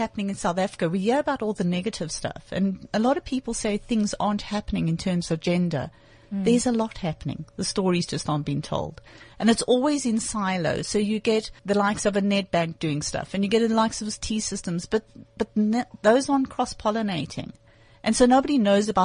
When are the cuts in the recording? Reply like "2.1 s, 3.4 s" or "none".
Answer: 11.6 s